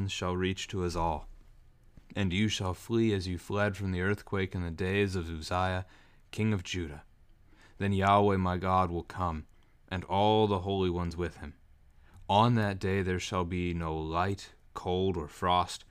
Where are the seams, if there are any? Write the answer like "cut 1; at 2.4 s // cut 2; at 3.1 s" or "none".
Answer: none